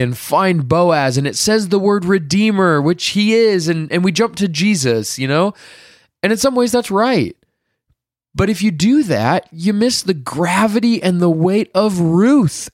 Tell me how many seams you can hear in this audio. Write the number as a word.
zero